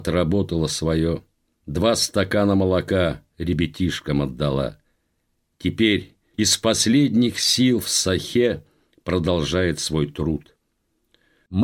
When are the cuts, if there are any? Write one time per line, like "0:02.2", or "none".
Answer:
0:06.3